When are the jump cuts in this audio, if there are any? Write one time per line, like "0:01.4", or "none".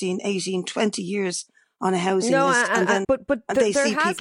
0:03.0

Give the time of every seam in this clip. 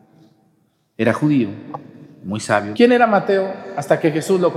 0:02.7

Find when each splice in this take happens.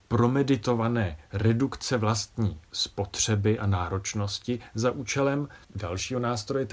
0:05.6

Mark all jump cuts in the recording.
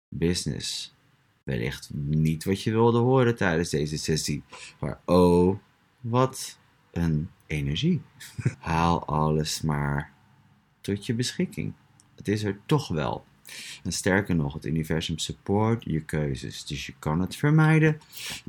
0:08.5

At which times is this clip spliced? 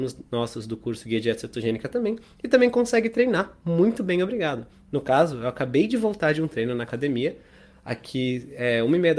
none

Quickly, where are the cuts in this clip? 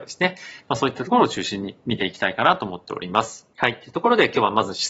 0:03.5

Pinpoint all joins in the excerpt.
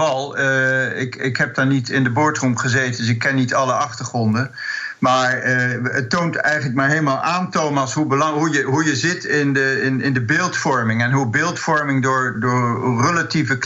0:12.3

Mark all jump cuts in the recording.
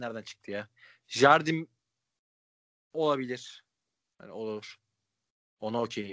none

